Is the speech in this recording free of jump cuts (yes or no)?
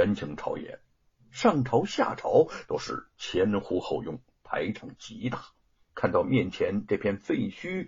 no